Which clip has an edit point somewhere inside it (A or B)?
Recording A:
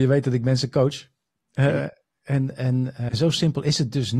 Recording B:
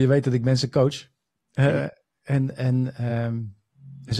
A